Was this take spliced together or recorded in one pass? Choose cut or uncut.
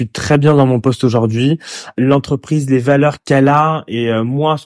uncut